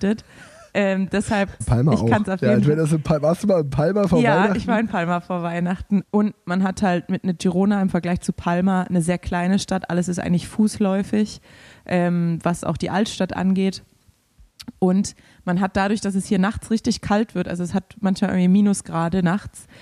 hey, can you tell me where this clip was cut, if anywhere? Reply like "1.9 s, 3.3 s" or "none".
1.6 s, 6.0 s